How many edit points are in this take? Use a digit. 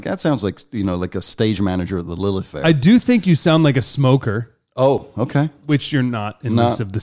0